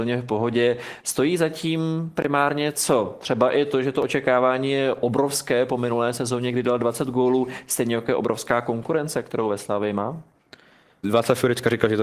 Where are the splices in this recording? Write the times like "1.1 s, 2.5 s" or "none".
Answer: 11.0 s